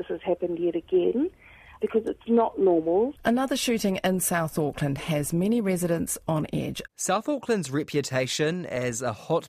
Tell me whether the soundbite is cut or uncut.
cut